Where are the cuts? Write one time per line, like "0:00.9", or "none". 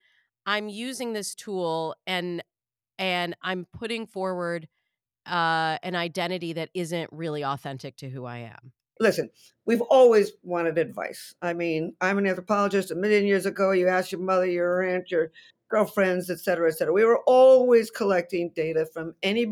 none